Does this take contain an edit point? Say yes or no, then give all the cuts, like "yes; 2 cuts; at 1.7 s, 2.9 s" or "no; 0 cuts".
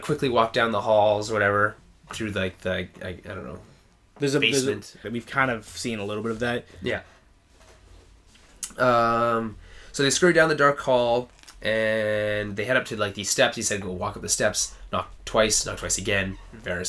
yes; 1 cut; at 5.0 s